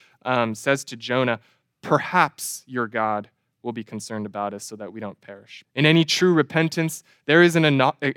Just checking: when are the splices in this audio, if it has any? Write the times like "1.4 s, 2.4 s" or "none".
5.6 s